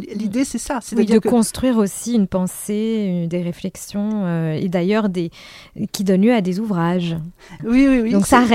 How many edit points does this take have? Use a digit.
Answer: 1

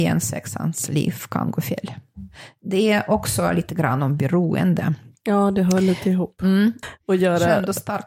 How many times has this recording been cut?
1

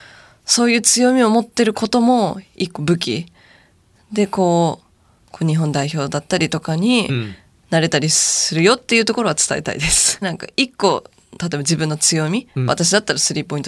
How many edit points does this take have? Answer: 2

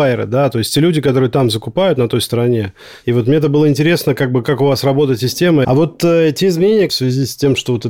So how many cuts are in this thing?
2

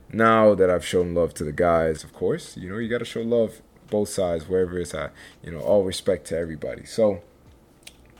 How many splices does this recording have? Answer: 1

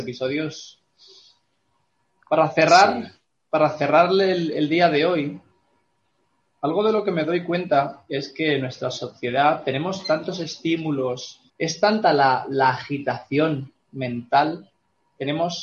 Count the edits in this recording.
1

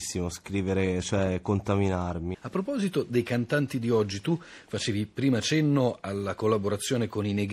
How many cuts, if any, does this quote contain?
1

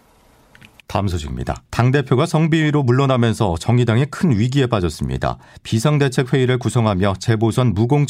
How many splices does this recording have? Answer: 1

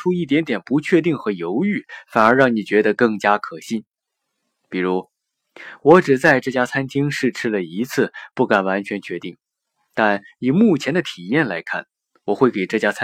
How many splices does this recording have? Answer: 0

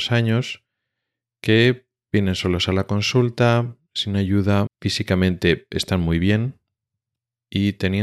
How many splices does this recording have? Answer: 1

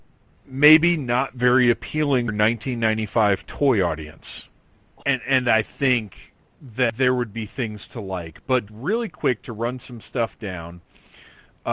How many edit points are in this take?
2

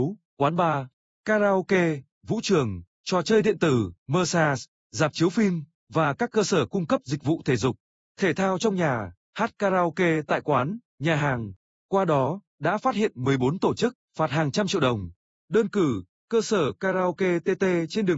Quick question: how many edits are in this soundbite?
1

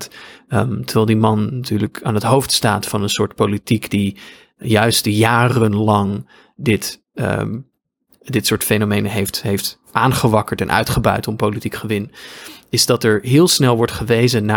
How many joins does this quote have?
0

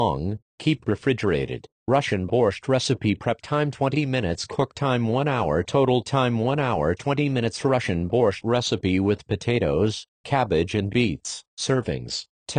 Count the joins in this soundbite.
2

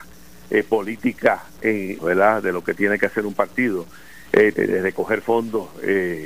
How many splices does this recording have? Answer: 2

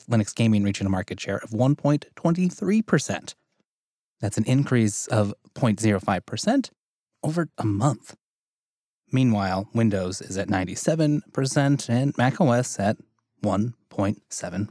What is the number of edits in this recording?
1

